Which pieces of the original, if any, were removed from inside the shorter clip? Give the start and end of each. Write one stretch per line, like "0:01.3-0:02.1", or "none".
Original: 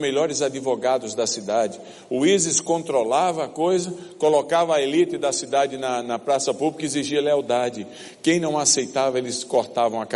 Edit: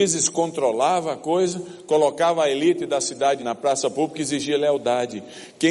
0:05.7-0:06.0